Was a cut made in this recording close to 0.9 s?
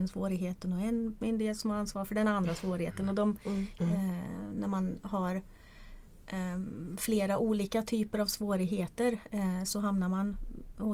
no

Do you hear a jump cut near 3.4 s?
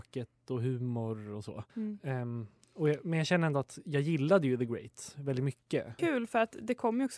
no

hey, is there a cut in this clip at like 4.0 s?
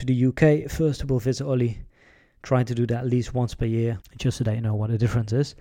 yes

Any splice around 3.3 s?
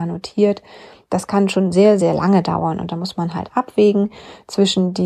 no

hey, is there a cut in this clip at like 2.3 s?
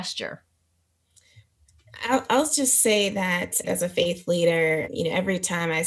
no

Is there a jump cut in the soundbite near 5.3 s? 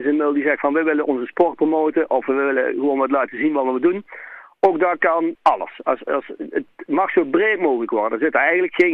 yes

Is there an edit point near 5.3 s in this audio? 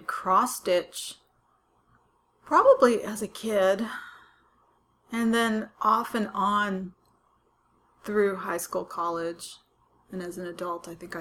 no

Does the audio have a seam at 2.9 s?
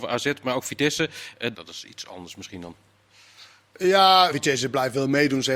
no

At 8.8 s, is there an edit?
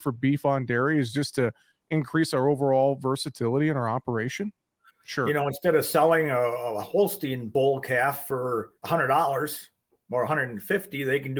yes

